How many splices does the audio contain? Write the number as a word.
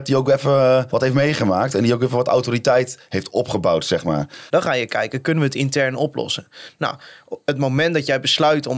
two